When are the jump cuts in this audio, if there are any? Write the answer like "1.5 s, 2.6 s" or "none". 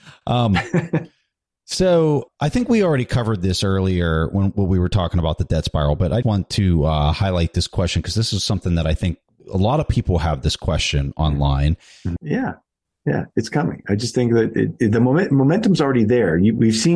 6.2 s, 12.2 s